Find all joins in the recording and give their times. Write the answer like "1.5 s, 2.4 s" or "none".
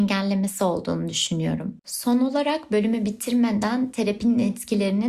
1.8 s